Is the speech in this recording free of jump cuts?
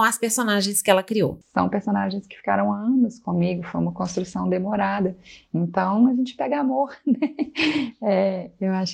yes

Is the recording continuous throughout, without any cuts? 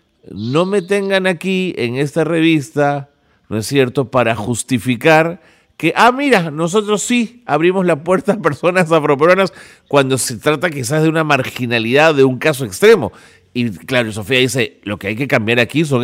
yes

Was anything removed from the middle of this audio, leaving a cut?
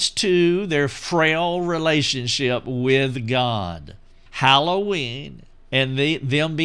yes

